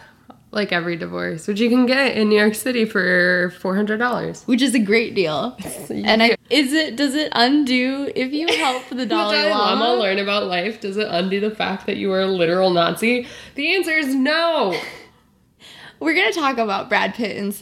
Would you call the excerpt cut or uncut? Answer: cut